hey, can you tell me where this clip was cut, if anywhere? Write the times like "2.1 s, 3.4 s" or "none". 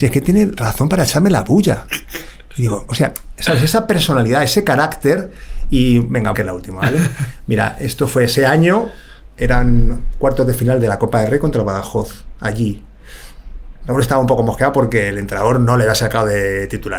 6.3 s